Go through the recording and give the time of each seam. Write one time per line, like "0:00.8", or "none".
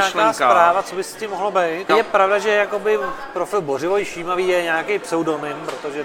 0:01.9